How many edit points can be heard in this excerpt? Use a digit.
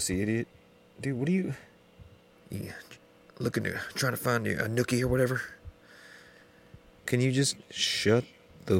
2